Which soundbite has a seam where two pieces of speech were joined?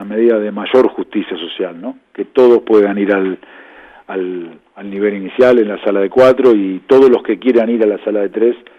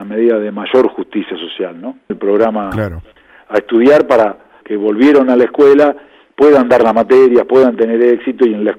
second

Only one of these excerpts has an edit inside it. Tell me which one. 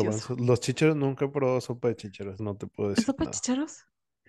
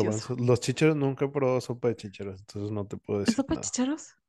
first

